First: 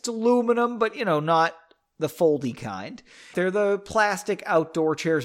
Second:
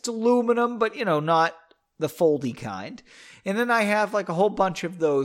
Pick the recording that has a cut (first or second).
first